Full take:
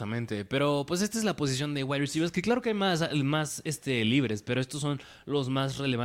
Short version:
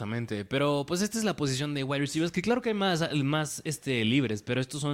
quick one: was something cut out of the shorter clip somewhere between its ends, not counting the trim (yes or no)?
no